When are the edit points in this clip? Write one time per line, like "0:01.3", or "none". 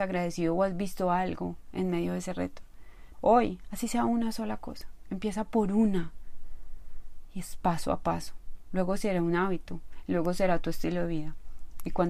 0:03.1

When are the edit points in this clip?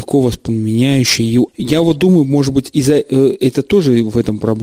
0:01.5

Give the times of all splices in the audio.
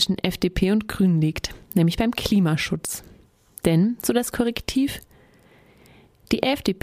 none

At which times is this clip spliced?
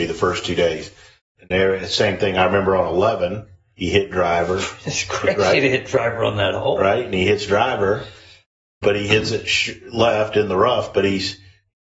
0:01.4

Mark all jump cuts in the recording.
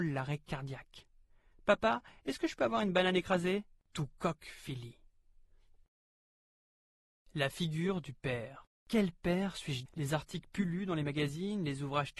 0:08.8
0:09.9

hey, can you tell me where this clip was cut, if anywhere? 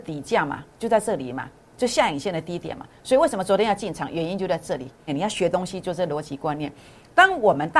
0:05.1

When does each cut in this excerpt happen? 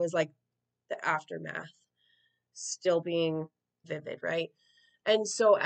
0:03.8

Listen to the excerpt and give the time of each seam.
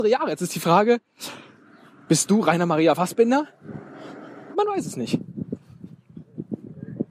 0:04.5

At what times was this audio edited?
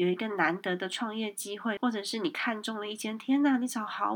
0:01.8

